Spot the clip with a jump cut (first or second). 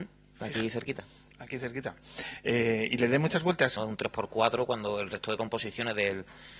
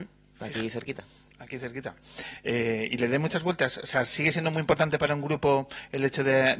first